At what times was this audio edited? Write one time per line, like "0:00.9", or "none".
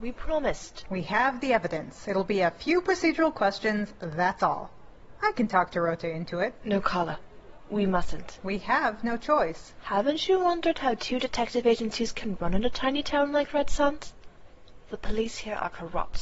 none

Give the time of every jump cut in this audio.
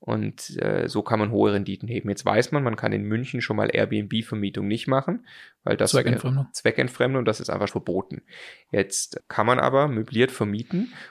0:07.7
0:09.2

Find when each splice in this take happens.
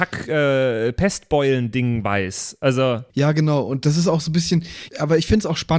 0:03.1
0:04.9

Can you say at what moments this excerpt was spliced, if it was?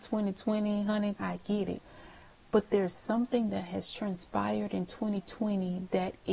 0:01.2

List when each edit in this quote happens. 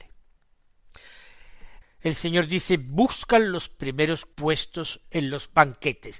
0:01.8
0:04.3

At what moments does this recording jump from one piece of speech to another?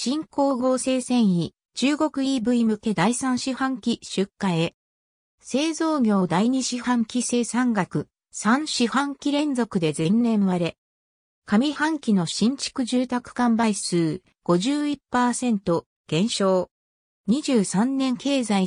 0:17.1

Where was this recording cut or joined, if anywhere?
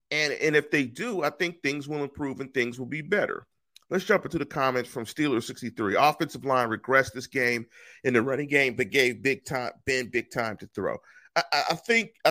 none

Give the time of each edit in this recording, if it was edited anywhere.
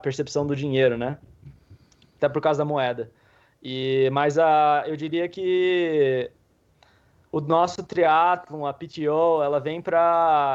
none

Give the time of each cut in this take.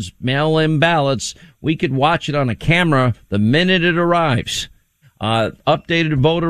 0:05.0

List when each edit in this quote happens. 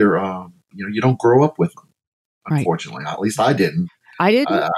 none

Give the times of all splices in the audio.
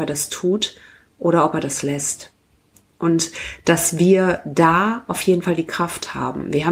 none

